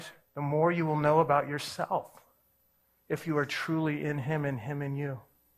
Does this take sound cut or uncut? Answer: uncut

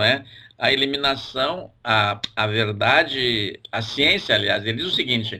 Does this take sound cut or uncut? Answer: uncut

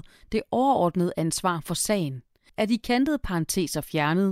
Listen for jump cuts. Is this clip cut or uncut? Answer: cut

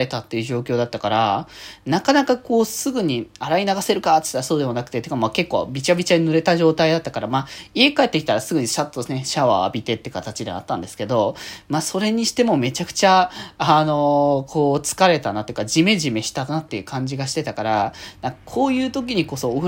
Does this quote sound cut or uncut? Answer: uncut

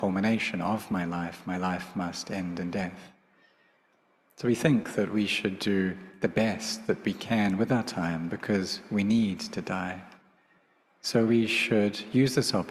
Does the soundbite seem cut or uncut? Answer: uncut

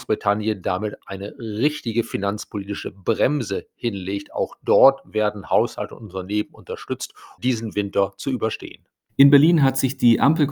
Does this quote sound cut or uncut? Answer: cut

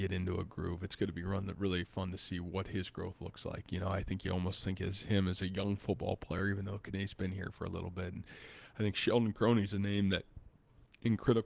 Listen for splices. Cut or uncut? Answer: uncut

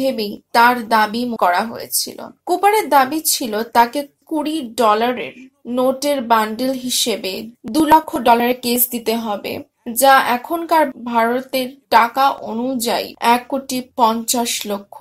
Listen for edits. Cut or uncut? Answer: cut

